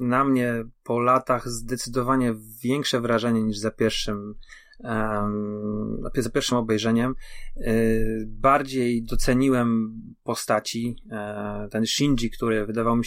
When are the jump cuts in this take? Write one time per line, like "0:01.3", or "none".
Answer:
none

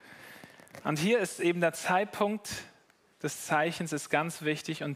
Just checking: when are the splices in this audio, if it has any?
none

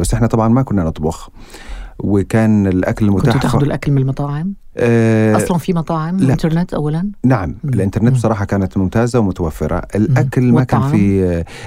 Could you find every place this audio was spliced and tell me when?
0:06.3

